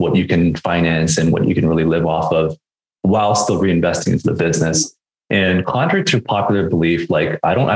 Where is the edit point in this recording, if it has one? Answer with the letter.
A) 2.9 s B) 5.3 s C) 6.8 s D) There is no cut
D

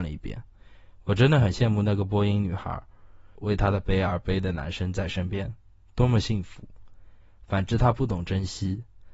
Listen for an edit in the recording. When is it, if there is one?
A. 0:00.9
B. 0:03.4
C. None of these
B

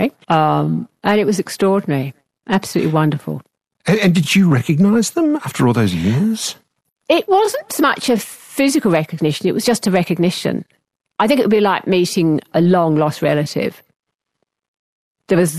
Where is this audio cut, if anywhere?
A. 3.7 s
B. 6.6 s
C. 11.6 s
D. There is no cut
D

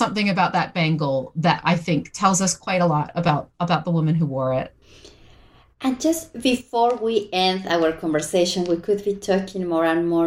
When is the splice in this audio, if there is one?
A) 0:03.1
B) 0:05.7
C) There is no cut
C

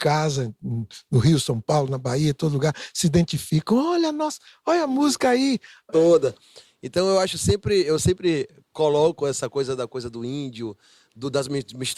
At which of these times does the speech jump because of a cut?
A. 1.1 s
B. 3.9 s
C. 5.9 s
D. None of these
C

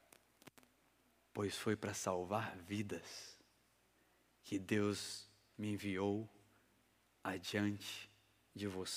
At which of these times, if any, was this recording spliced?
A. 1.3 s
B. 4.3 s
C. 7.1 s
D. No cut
A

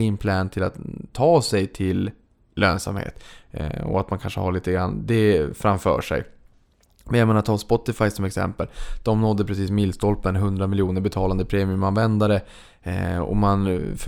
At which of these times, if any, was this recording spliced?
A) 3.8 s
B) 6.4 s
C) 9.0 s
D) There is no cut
D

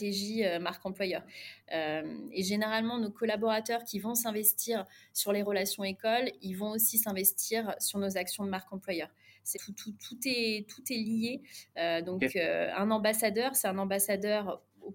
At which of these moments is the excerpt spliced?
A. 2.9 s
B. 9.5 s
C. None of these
B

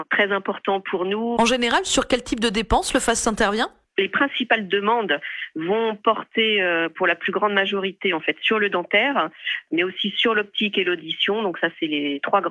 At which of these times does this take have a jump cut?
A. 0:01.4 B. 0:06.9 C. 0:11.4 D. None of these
A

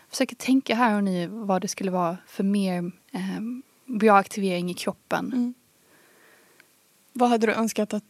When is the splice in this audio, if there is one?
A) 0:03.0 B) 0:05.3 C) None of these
A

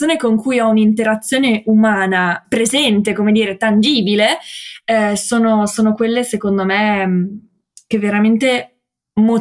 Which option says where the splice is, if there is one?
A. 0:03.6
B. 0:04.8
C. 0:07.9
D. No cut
D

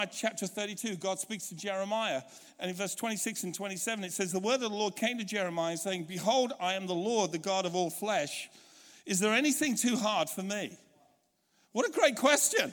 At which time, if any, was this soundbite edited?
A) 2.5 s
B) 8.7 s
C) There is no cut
C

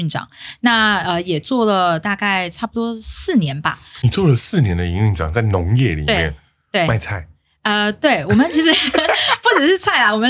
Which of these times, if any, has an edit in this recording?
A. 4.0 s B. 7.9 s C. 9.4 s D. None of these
D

